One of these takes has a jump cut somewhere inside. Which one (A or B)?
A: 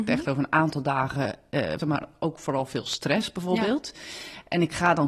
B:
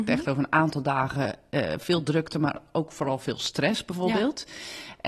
A